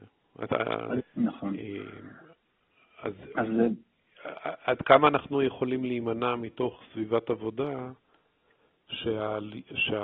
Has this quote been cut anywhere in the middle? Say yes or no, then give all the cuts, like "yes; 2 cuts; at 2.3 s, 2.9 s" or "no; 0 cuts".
yes; 1 cut; at 1.0 s